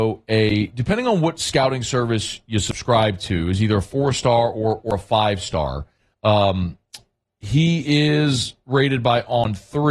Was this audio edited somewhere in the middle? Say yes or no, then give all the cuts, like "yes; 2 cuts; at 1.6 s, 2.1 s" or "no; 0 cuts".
yes; 1 cut; at 6.1 s